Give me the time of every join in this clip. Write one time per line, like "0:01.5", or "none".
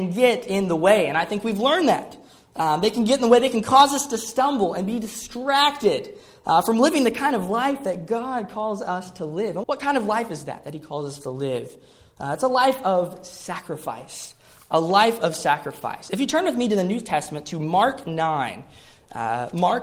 0:09.6